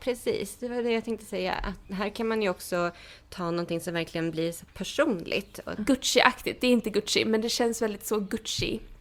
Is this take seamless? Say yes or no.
no